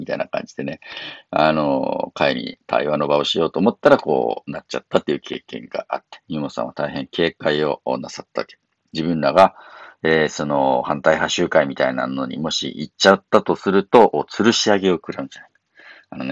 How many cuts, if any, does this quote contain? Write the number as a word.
zero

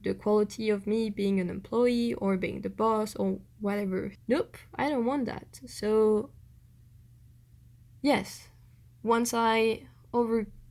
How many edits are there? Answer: one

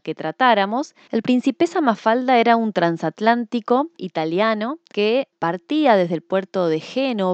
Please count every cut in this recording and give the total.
one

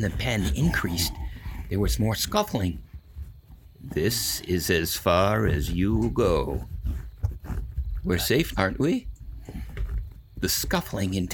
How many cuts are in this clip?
one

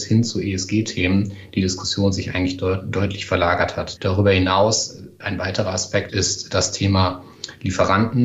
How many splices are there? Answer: two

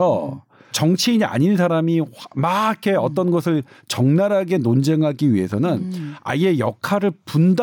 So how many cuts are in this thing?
zero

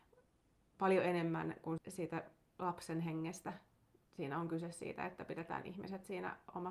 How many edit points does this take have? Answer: one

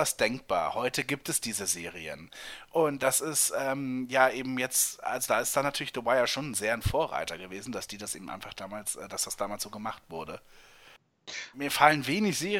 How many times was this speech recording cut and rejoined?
one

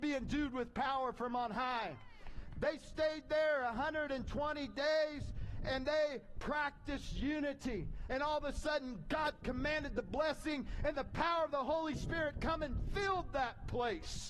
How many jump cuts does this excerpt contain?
one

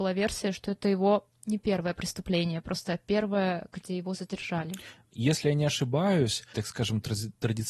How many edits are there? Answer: two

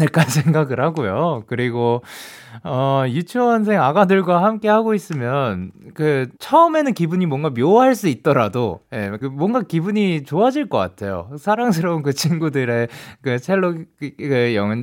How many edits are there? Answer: two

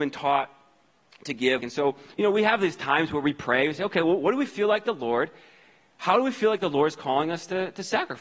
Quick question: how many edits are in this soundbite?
one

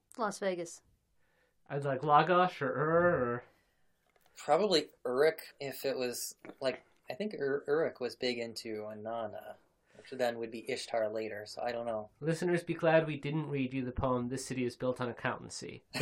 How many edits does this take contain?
one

